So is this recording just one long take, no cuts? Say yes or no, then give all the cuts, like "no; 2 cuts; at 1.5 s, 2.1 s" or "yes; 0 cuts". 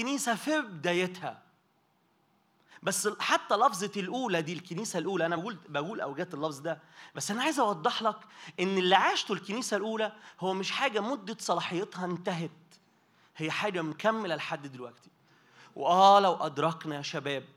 yes; 0 cuts